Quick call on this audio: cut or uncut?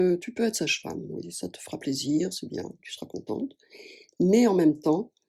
cut